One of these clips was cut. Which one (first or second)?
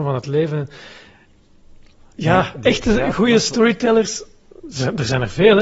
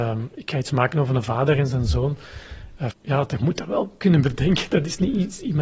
second